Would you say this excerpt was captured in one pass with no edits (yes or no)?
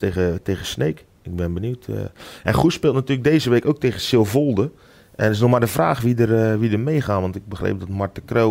yes